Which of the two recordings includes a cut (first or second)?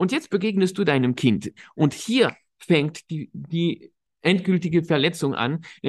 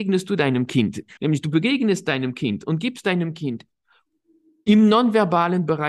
second